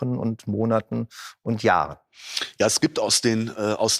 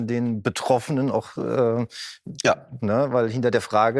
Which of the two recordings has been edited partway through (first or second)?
second